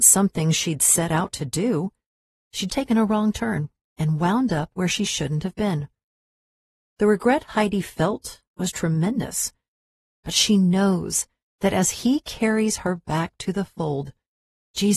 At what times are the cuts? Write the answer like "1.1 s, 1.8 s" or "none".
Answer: 2.7 s